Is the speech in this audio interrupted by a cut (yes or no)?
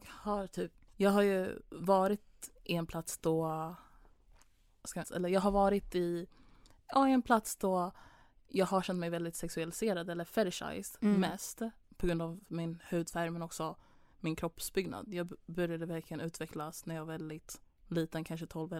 yes